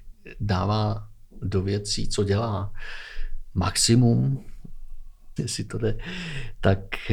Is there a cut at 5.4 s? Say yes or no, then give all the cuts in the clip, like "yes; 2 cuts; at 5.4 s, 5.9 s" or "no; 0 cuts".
yes; 1 cut; at 5.4 s